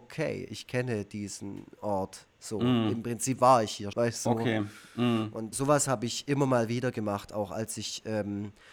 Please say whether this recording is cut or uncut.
cut